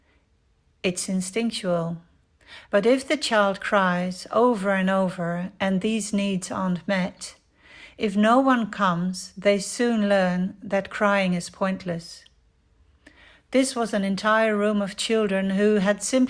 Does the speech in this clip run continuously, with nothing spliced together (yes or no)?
no